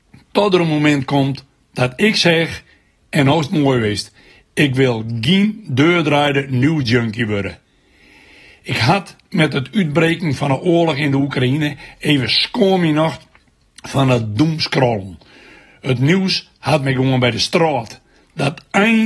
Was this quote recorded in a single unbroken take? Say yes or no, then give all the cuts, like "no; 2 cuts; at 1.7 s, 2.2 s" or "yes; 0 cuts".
yes; 0 cuts